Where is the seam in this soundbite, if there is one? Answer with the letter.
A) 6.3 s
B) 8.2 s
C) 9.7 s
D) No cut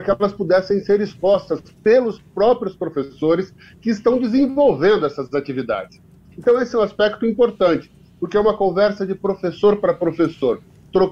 A